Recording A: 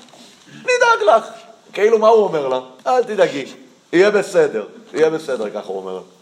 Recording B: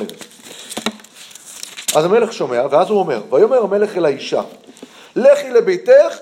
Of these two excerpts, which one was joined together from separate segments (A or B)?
A